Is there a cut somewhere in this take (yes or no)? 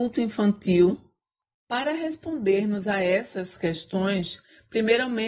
yes